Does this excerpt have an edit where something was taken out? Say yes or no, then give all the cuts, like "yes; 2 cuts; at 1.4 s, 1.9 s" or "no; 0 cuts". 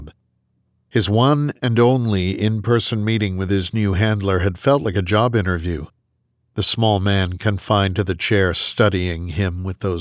no; 0 cuts